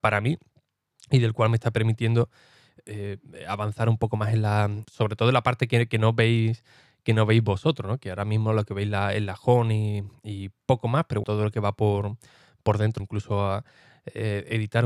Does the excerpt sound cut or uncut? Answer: cut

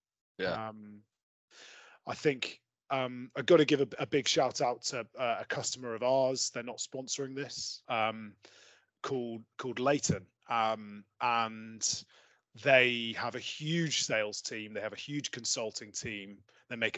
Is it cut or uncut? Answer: cut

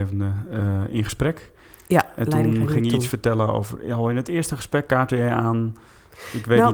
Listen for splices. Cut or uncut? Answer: uncut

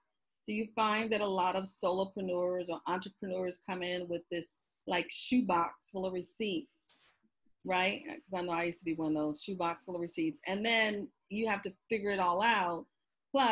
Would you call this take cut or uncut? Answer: uncut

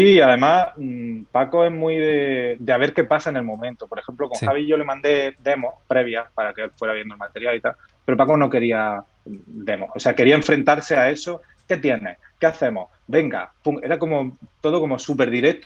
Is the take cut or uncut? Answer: cut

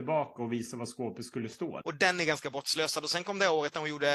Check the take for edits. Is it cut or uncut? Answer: cut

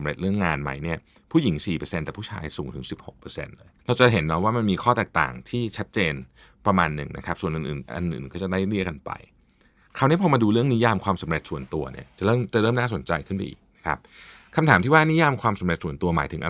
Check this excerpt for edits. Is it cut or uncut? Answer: cut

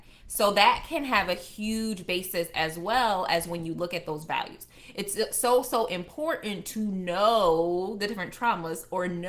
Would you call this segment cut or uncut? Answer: uncut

